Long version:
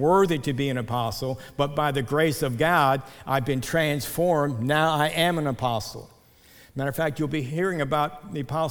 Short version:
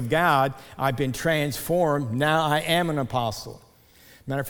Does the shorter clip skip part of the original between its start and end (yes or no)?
no